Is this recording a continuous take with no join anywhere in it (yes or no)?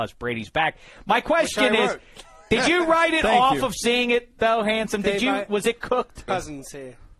no